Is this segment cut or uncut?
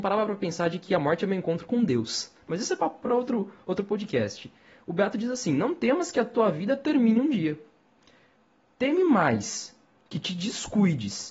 uncut